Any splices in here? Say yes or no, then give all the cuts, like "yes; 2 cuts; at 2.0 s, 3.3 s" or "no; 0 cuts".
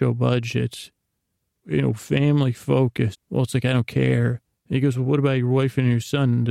yes; 2 cuts; at 3.1 s, 4.5 s